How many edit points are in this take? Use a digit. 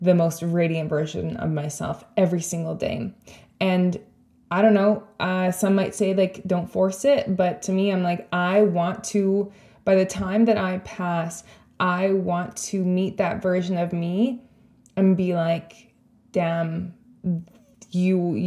0